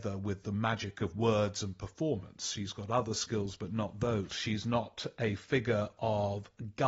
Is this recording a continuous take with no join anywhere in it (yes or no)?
no